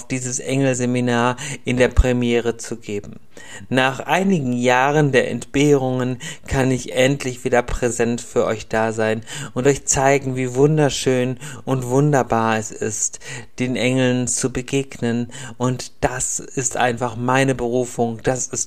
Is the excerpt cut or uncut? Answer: uncut